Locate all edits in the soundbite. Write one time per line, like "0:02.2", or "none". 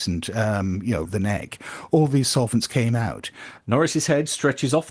0:01.0
0:03.6